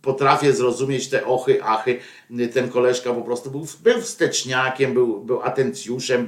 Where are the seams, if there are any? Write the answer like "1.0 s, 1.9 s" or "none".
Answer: none